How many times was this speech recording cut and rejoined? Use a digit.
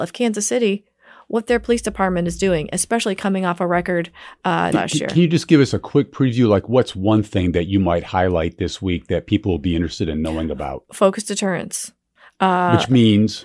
1